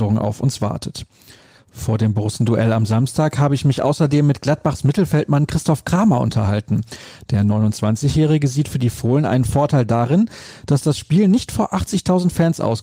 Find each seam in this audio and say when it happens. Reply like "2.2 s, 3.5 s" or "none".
none

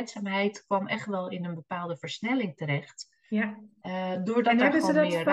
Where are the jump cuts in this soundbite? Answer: none

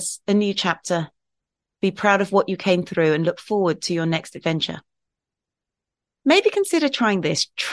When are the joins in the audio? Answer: none

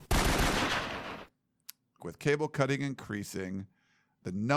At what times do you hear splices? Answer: 2.0 s

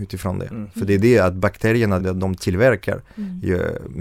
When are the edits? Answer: 2.0 s

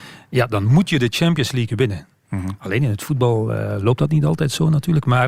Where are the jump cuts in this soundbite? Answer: none

